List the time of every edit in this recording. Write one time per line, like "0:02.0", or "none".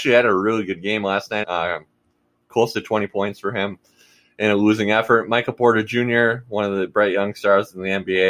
0:01.4

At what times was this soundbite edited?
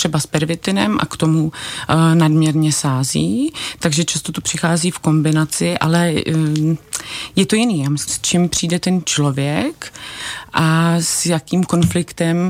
0:08.1

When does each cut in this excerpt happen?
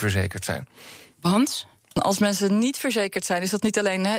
0:01.8

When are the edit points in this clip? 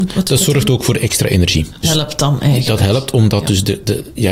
0:01.8

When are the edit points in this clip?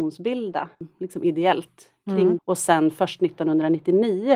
0:02.4

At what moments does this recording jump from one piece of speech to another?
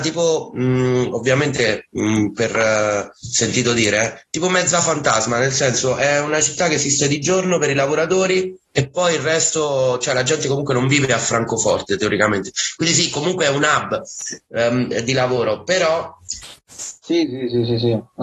0:16.6

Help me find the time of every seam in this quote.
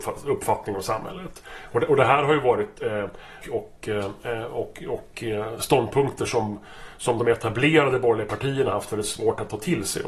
0:03.4

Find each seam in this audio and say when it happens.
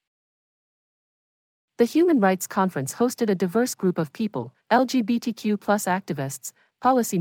0:04.6

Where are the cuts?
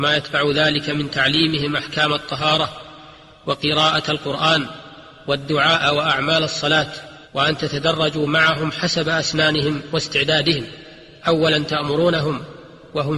0:07.3

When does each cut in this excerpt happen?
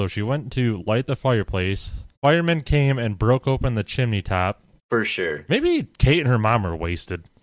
0:02.1
0:04.8

